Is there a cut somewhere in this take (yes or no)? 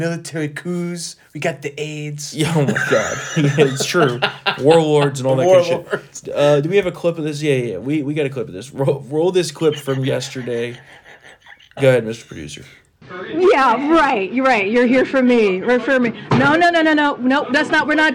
no